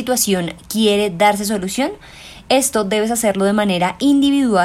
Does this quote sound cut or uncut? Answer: uncut